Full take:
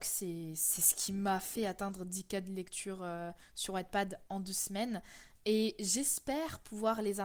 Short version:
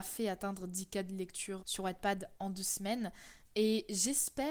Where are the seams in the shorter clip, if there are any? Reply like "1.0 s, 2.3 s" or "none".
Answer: 1.6 s